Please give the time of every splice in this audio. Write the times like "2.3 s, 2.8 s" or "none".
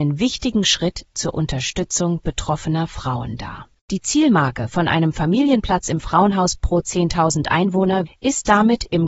3.7 s, 8.1 s